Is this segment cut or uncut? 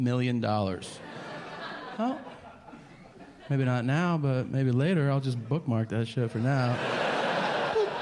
uncut